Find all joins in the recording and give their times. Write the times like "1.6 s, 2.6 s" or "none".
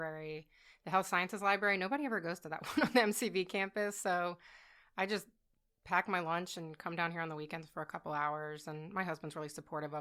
none